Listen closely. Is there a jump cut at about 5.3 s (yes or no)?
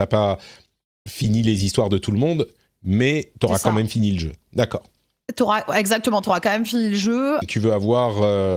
no